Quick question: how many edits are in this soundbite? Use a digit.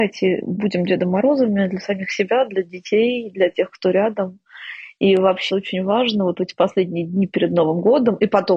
1